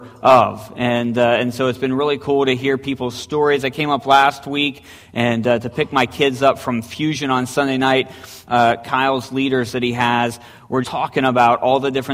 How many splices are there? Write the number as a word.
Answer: two